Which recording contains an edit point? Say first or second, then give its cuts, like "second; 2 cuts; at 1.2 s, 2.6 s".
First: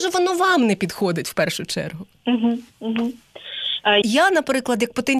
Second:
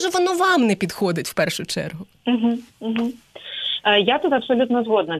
first; 1 cut; at 4.0 s